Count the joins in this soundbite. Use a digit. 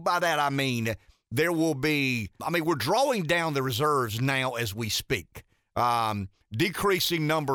1